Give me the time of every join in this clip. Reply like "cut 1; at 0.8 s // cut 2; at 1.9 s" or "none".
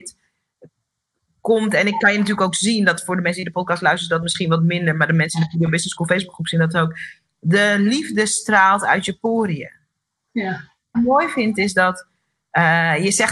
cut 1; at 10.9 s